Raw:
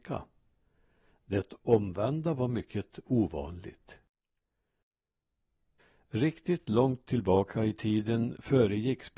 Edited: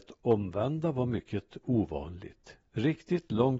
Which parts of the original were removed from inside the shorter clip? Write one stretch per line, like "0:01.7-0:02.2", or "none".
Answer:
0:04.1-0:06.0